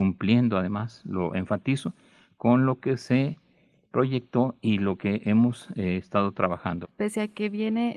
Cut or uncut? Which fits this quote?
cut